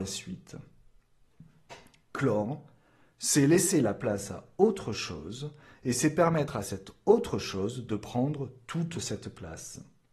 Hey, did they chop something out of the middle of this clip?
no; 0 cuts

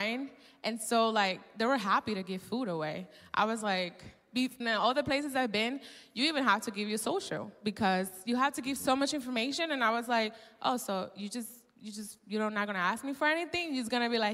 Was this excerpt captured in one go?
no; 1 cut; at 4.6 s

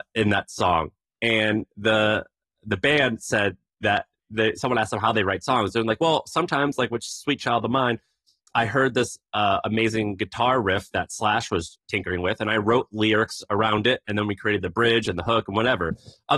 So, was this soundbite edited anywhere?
no; 0 cuts

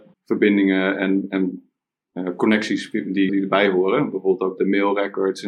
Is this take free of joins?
no; 2 cuts; at 3.3 s, 4.6 s

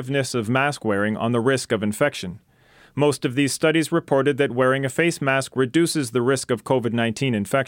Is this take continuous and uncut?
yes; 0 cuts

